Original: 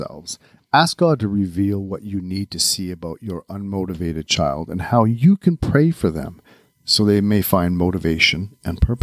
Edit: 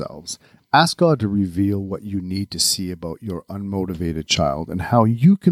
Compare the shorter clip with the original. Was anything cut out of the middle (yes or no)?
no